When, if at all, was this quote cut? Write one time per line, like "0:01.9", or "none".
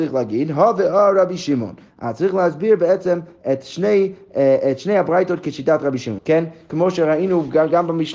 0:06.2